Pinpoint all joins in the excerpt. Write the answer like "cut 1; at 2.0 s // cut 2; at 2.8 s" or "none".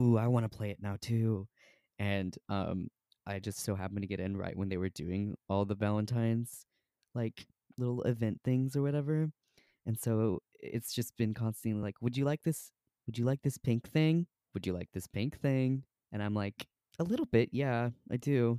none